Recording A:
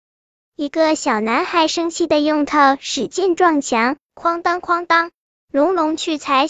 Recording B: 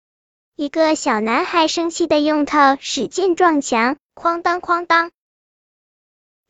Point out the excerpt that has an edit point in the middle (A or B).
A